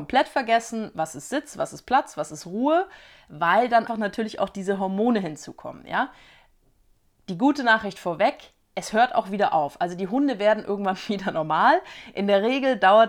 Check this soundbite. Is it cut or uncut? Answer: cut